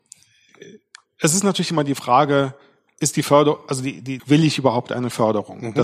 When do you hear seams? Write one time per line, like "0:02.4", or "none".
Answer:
0:04.2